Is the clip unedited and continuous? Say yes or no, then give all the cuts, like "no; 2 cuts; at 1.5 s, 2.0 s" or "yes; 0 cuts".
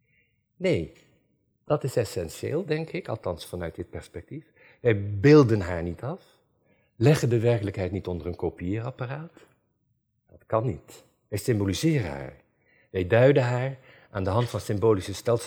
yes; 0 cuts